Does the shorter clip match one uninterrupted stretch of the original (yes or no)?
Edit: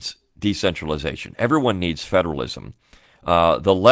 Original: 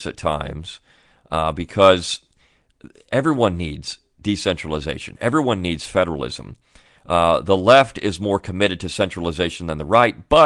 yes